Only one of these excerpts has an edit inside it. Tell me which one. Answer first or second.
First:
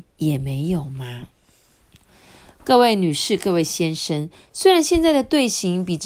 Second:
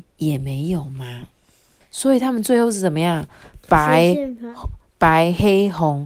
second